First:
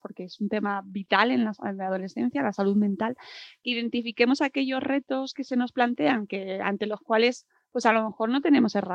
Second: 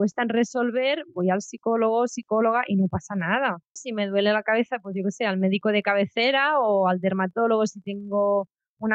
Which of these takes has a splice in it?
second; 1 cut; at 3.8 s

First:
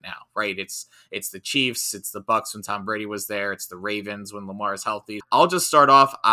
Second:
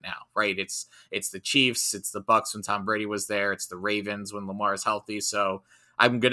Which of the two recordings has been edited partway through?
first; 1 cut; at 5.2 s

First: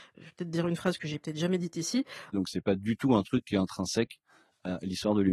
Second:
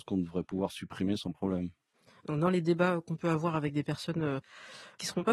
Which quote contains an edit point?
first; 1 cut; at 2.3 s

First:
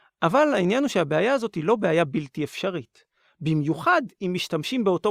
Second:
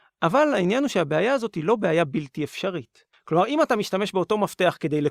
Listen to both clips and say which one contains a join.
second; 1 cut; at 3.1 s

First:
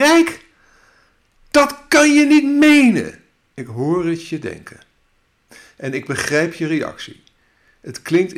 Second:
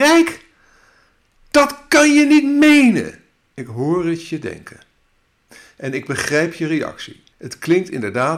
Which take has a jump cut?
second; 1 cut; at 7.3 s

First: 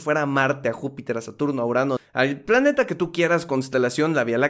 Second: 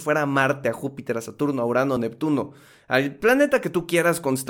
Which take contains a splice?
first; 1 cut; at 2.0 s

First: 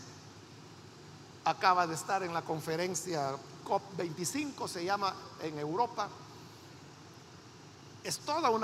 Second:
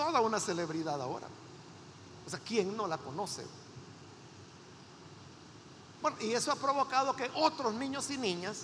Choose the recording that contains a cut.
second; 1 cut; at 6.0 s

